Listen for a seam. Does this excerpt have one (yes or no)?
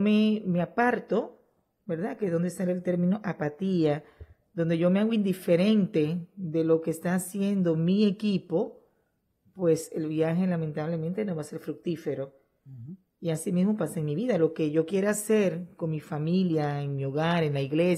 no